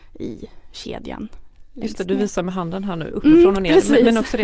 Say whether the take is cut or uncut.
uncut